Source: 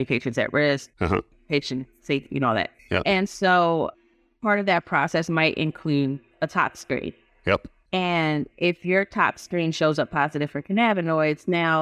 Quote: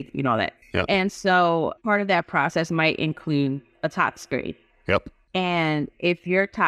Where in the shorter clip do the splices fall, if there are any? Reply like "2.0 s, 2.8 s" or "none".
1.8 s